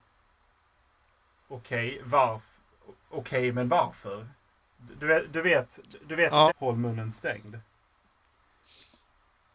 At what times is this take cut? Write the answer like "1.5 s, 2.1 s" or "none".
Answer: 6.5 s